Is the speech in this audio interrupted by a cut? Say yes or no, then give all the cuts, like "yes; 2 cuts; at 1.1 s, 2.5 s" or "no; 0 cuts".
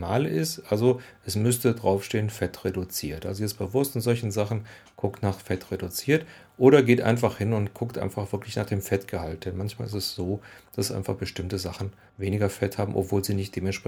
no; 0 cuts